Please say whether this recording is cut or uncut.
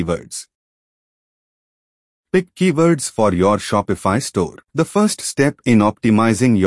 cut